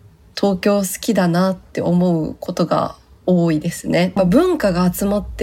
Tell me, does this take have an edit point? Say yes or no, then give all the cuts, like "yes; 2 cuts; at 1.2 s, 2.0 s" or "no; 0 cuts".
yes; 1 cut; at 4.2 s